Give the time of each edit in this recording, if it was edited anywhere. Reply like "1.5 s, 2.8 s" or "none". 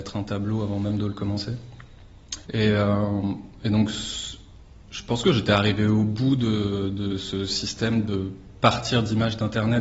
2.4 s